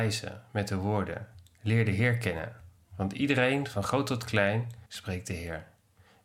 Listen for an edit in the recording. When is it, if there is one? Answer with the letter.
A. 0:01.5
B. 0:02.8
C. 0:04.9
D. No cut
C